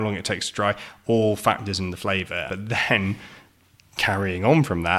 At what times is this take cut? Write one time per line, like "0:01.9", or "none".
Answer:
0:02.5